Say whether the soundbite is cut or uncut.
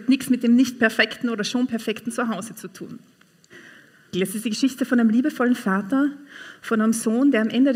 cut